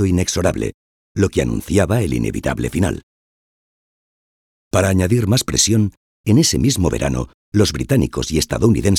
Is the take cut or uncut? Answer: uncut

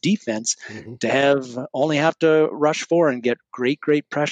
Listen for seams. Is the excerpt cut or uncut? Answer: uncut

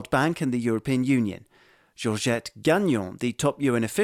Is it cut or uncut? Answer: uncut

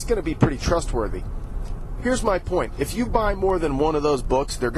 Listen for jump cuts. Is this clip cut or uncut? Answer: uncut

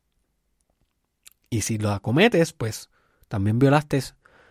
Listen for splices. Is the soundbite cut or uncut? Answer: uncut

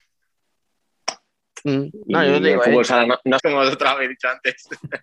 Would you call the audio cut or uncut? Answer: cut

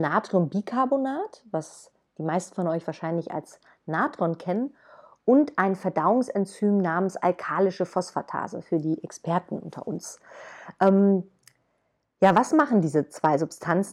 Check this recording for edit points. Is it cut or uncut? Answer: uncut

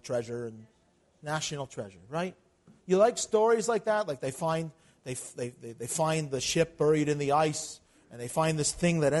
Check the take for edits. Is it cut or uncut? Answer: uncut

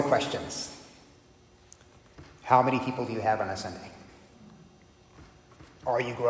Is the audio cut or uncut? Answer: uncut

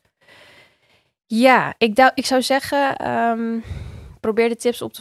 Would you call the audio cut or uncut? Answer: uncut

